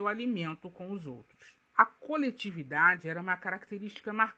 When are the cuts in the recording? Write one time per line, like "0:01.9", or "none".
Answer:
none

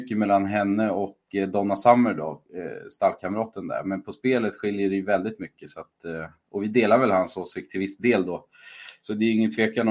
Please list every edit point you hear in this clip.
none

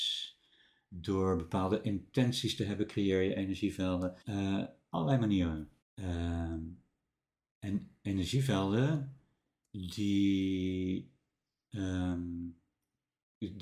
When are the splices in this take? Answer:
0:04.2
0:05.8

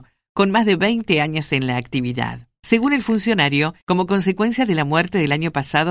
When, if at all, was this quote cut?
0:02.6

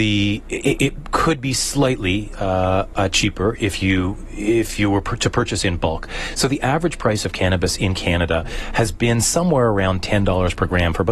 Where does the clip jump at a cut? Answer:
none

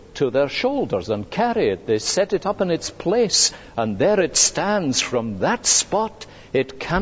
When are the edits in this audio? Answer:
none

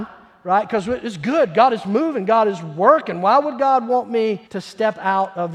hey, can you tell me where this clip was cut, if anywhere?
0:04.5

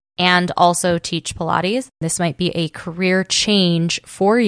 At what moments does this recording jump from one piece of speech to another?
0:02.0

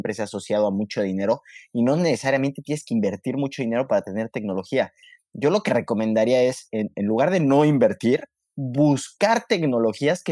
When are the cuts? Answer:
none

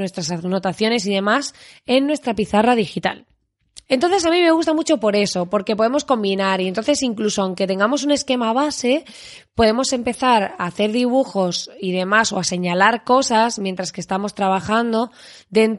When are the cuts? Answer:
0:03.9

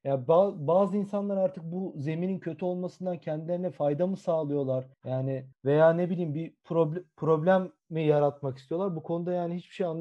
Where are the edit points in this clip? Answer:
none

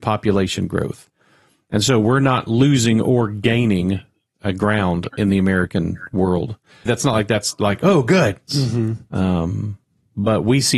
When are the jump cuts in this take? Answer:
0:06.9
0:08.5

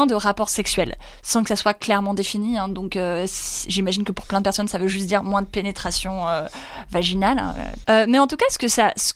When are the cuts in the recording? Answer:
0:07.8

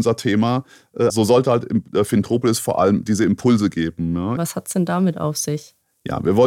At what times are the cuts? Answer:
0:01.1
0:04.4

